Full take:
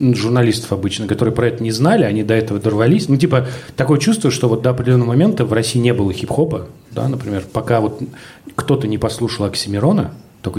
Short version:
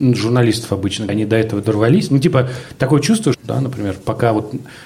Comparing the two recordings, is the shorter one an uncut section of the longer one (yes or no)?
no